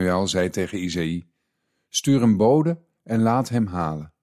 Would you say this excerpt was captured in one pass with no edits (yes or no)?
yes